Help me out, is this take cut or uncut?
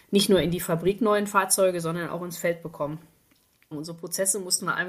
cut